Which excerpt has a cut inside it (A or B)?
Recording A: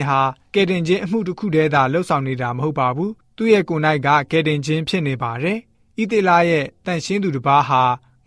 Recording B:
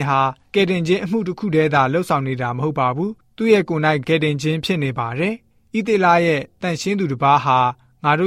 B